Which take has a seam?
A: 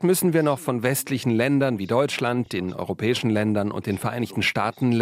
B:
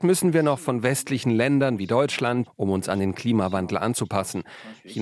B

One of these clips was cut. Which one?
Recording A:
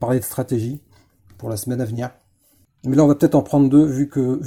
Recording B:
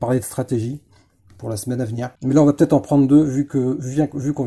B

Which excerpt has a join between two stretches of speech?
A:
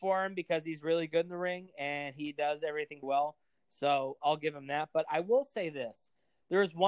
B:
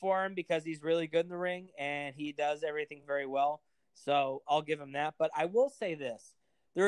A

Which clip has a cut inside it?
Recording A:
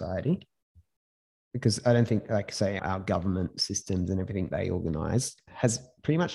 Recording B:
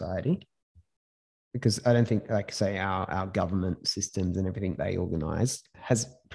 A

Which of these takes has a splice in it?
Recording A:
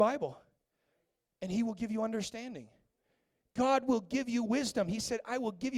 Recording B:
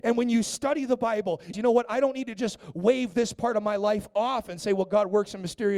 B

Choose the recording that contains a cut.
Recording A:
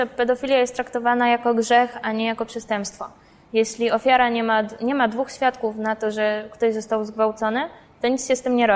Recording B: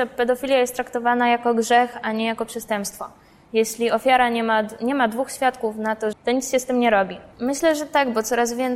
B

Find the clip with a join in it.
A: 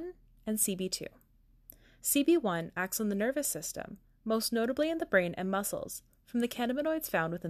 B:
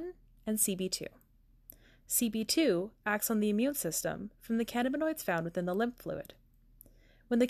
B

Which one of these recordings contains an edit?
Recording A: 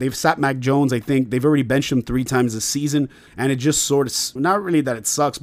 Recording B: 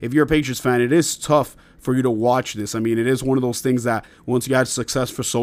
A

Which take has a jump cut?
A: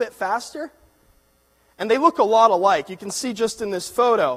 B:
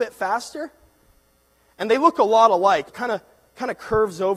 B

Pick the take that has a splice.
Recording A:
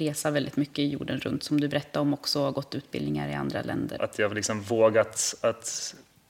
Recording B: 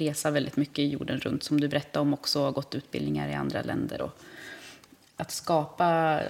A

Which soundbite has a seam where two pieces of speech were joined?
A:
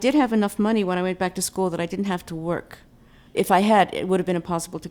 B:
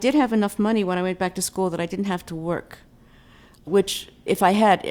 A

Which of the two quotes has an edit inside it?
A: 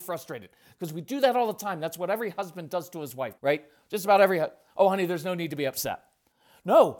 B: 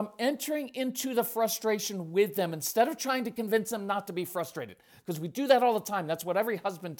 A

